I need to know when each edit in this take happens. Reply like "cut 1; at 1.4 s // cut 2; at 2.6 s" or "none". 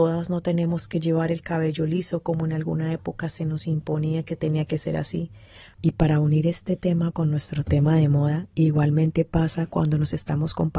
cut 1; at 5.7 s // cut 2; at 7.1 s